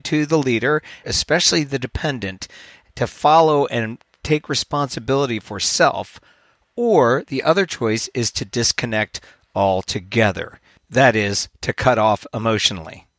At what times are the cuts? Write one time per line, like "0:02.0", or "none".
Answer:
0:01.0